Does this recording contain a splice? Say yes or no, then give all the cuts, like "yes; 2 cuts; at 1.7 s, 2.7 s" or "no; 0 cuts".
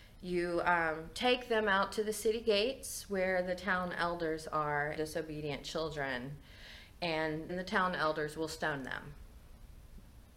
yes; 2 cuts; at 5.0 s, 7.5 s